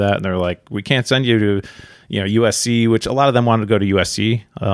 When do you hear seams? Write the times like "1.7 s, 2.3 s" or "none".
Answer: none